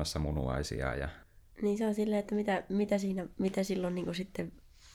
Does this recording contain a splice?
no; 0 cuts

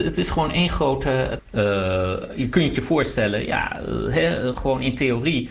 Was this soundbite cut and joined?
yes; 2 cuts; at 1.4 s, 4.5 s

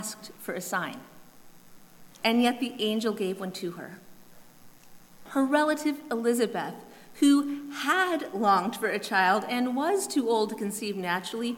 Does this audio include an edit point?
yes; 1 cut; at 5.3 s

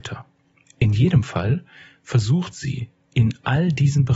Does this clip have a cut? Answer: no; 0 cuts

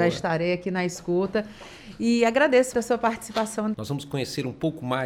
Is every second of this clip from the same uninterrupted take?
no; 2 cuts; at 2.7 s, 3.7 s

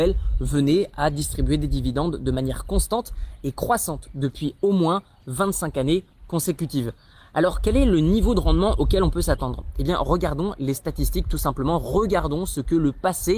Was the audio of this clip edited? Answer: no; 0 cuts

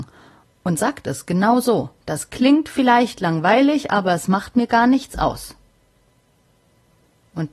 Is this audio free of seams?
no; 1 cut; at 2.0 s

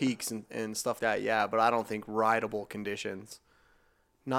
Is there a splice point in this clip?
yes; 1 cut; at 1.0 s

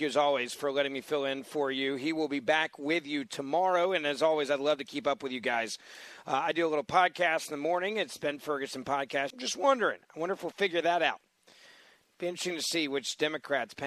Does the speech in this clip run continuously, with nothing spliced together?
no; 2 cuts; at 9.3 s, 12.0 s

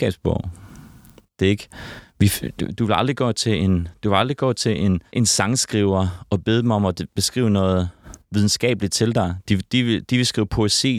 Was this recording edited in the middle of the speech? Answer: no; 0 cuts

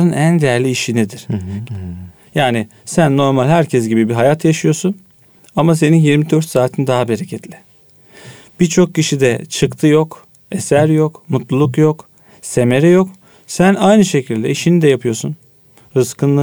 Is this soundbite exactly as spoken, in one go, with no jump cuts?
no; 1 cut; at 1.7 s

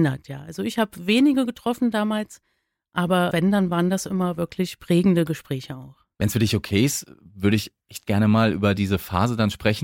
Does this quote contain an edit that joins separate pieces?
yes; 2 cuts; at 3.3 s, 6.2 s

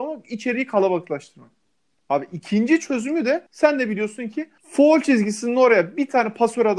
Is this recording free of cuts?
no; 2 cuts; at 3.5 s, 4.6 s

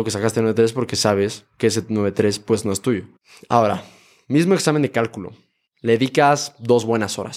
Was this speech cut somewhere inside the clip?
no; 0 cuts

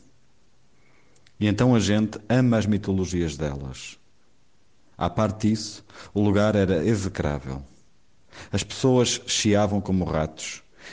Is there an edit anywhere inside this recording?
no; 0 cuts

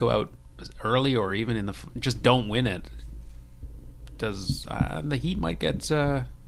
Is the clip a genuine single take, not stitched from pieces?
yes; 0 cuts

